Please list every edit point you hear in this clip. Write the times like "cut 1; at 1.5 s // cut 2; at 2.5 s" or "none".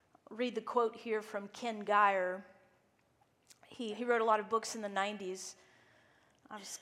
cut 1; at 3.9 s